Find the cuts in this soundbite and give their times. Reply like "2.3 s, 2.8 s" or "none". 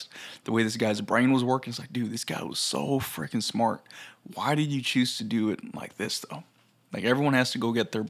none